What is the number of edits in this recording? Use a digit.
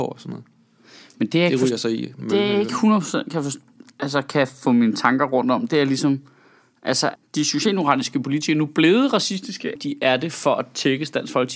2